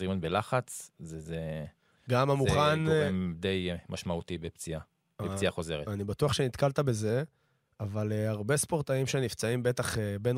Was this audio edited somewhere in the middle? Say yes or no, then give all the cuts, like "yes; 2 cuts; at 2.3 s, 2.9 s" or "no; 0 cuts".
no; 0 cuts